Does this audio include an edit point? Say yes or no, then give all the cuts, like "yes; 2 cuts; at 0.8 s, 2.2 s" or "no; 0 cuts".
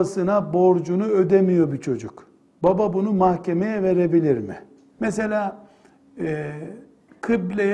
yes; 1 cut; at 4.9 s